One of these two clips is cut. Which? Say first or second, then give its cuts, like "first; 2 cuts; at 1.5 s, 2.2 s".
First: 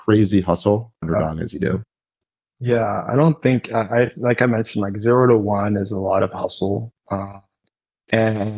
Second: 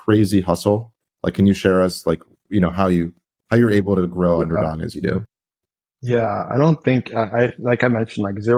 first; 1 cut; at 1.0 s